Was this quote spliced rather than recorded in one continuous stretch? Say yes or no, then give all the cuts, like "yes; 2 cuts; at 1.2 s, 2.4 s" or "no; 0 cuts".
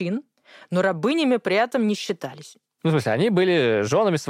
no; 0 cuts